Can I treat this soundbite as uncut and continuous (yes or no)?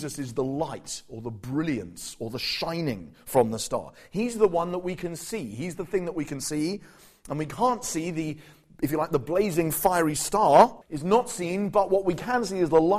no